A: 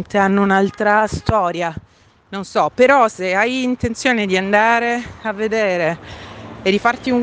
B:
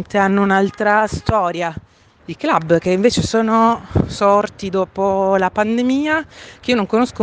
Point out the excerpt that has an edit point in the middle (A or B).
B